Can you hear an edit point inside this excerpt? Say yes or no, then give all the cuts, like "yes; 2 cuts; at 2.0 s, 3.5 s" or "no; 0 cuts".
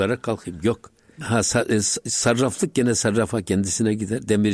yes; 1 cut; at 1.2 s